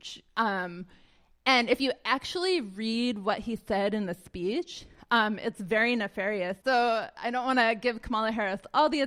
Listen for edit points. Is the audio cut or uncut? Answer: cut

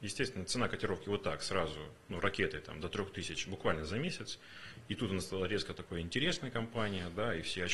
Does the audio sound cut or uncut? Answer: uncut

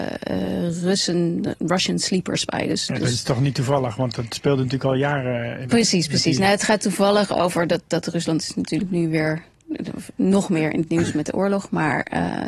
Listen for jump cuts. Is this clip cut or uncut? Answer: uncut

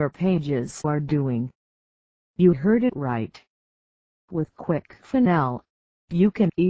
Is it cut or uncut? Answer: uncut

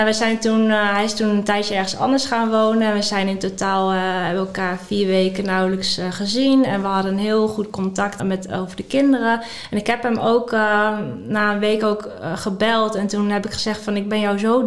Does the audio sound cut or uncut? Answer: cut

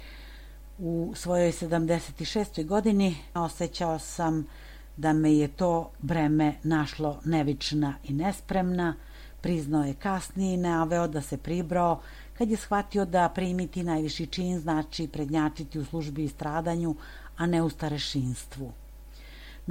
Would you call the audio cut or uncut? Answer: cut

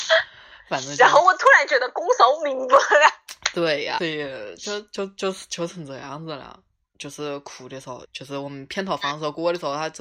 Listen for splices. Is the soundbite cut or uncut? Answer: cut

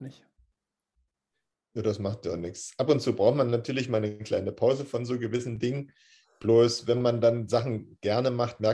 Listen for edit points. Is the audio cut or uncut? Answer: uncut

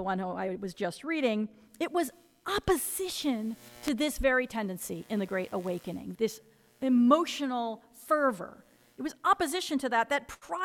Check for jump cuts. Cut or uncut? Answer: cut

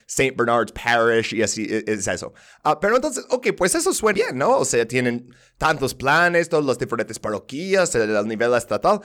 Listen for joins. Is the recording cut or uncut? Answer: cut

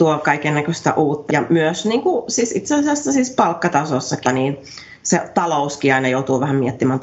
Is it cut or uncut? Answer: cut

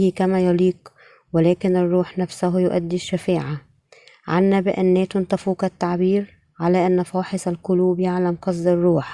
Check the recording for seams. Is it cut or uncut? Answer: uncut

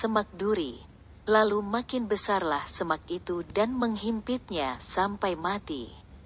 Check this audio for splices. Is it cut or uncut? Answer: uncut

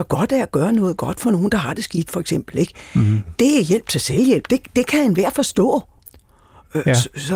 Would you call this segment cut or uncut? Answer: uncut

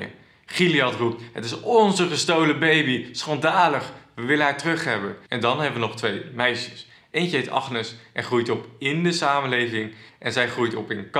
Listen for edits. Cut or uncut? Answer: cut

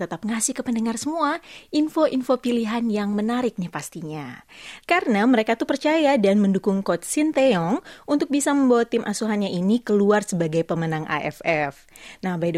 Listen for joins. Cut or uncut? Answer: cut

